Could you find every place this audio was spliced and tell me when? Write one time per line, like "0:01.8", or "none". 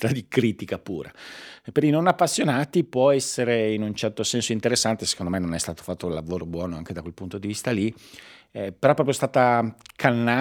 none